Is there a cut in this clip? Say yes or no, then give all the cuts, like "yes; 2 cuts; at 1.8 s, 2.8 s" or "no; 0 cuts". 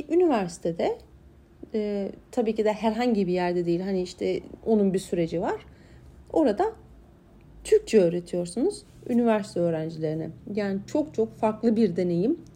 no; 0 cuts